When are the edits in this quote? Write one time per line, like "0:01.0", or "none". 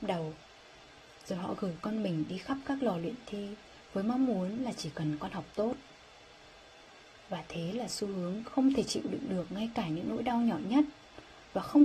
none